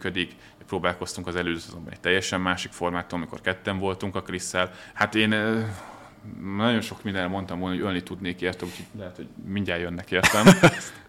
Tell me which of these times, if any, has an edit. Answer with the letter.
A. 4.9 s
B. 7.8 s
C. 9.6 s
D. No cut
A